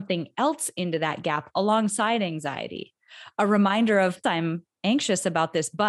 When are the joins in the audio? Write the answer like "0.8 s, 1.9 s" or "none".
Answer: 4.2 s